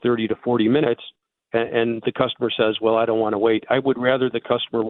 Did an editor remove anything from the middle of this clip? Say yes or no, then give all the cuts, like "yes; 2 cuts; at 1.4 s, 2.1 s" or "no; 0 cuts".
no; 0 cuts